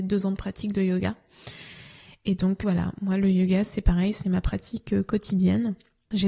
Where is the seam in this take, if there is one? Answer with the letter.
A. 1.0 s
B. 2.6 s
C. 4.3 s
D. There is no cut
B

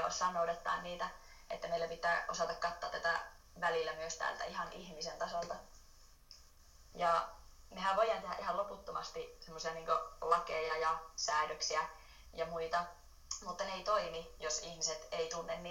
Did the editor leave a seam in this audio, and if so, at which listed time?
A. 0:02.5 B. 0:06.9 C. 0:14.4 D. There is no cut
B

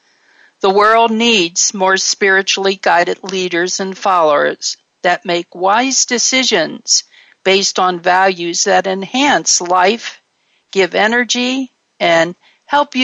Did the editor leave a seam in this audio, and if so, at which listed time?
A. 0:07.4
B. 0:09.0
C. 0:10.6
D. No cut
D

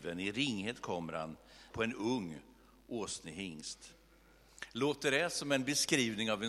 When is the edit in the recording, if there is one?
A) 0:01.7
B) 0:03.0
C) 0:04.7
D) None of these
A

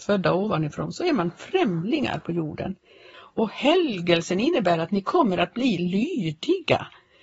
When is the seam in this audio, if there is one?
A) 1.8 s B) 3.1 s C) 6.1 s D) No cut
B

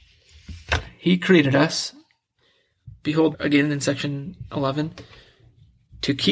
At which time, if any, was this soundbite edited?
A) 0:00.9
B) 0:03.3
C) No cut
B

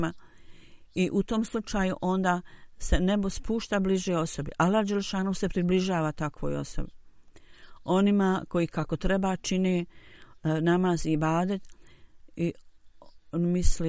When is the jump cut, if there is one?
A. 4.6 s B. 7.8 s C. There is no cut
C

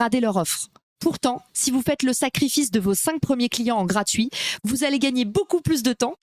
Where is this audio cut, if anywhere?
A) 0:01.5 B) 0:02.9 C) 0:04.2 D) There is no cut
A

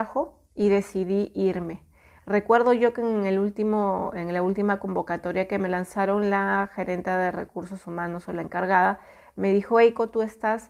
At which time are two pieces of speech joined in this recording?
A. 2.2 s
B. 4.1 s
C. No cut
C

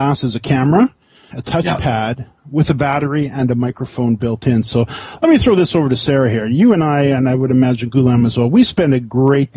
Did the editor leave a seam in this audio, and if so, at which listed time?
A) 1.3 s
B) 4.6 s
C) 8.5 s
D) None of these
A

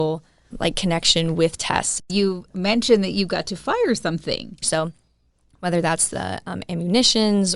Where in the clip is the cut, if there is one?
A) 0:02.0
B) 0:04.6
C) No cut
B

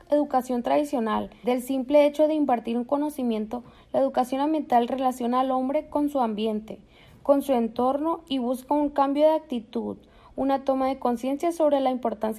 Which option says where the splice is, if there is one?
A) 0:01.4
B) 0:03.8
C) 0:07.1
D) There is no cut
A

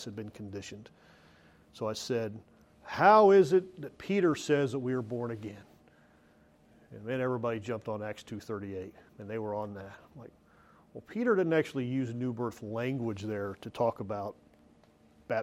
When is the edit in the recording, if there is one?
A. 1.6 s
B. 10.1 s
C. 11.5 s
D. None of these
D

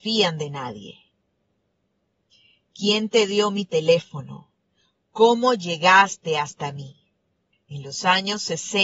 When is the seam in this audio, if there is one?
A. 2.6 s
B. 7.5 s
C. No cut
B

